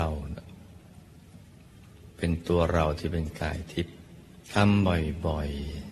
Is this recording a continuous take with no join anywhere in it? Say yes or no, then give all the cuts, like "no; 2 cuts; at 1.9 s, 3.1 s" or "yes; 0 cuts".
no; 1 cut; at 4.4 s